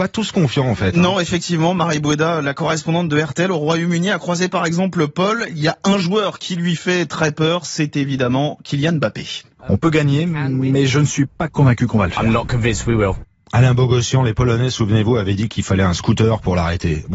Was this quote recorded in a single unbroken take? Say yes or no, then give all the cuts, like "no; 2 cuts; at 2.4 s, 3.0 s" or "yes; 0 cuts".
no; 1 cut; at 9.6 s